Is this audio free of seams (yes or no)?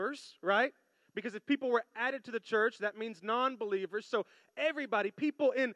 yes